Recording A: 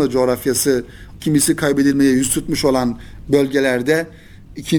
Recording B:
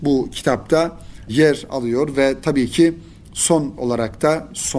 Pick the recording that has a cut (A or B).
A